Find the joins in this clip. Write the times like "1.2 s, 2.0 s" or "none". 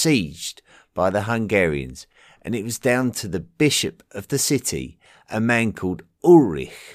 none